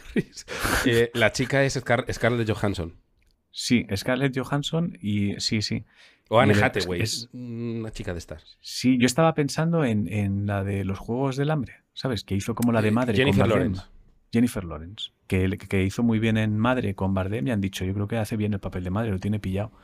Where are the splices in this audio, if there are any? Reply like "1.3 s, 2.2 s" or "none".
3.3 s

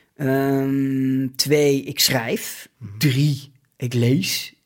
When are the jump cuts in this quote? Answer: none

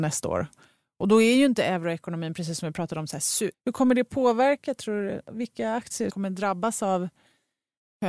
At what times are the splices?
3.5 s

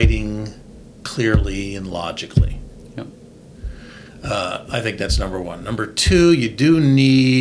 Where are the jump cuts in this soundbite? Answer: none

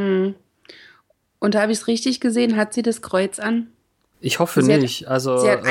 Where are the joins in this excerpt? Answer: 4.1 s

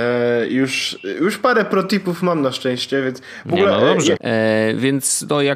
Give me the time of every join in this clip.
4.2 s

